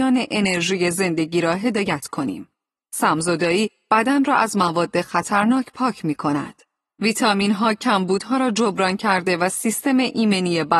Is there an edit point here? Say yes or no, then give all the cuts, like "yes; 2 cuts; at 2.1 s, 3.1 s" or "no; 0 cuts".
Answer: no; 0 cuts